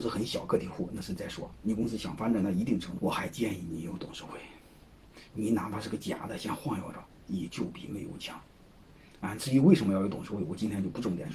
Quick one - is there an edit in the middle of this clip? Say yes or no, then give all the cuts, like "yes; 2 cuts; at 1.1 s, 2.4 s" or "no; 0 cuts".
yes; 1 cut; at 3.0 s